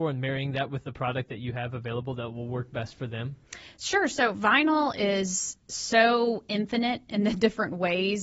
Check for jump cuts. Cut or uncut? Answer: uncut